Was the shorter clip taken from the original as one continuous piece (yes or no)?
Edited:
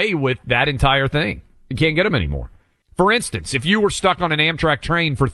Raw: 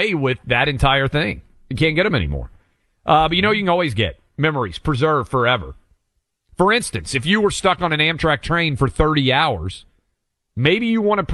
no